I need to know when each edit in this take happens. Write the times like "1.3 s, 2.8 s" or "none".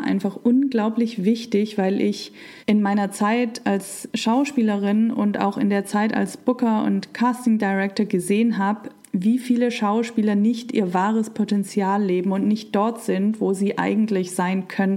2.6 s